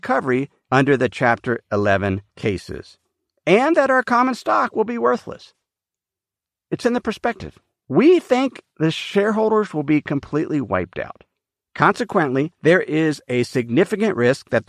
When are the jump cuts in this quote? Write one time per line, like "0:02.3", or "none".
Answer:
0:11.6